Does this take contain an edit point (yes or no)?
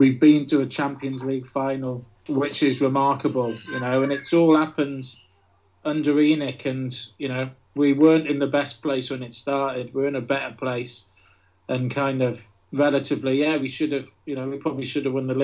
no